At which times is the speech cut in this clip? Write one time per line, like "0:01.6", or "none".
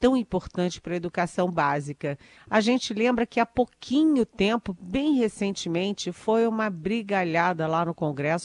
0:02.4

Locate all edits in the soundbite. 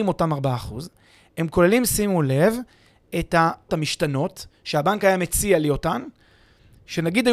0:03.7

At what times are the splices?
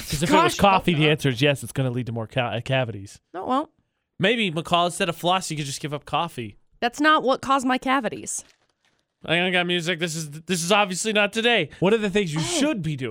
0:09.2
0:11.8

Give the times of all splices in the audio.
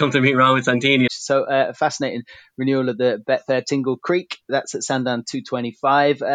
0:01.1

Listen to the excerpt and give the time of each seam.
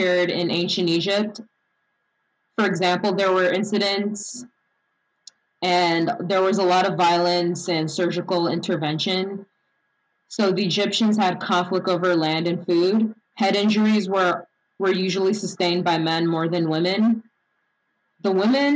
0:13.2

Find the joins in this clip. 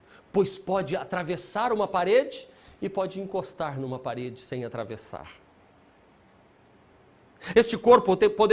0:07.5

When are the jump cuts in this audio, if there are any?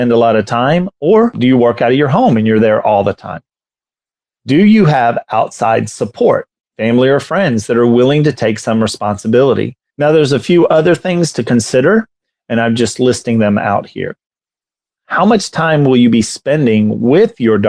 0:09.9

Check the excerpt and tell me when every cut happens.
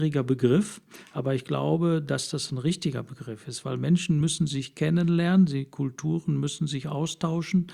none

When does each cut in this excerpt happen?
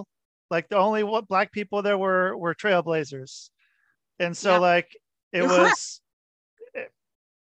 none

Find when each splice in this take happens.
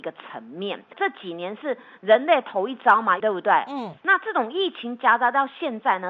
0:00.9
0:03.2

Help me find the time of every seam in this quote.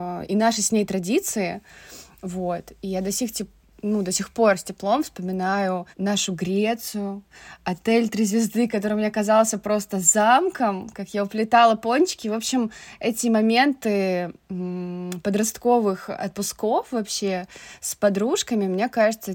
0:05.9

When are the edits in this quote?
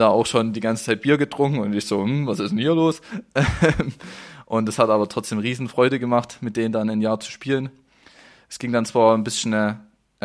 none

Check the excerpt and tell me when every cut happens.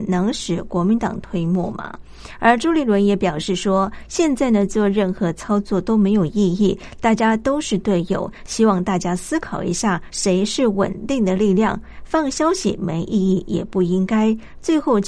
0:10.1

